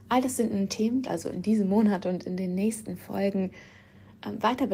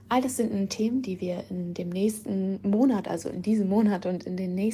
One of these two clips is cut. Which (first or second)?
first